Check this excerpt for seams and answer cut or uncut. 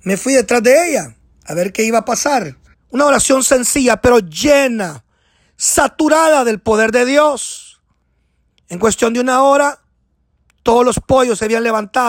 cut